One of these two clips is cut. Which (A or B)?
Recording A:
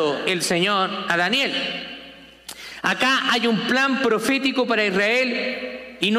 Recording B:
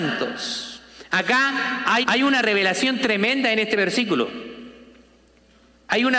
B